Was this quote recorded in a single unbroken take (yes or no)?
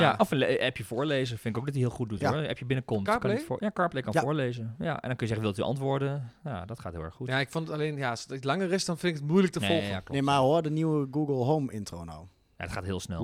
yes